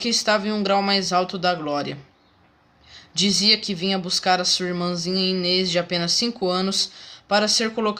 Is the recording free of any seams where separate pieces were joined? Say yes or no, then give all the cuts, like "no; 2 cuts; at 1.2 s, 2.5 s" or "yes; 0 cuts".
yes; 0 cuts